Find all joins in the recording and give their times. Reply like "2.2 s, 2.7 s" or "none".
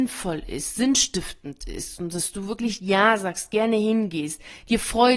none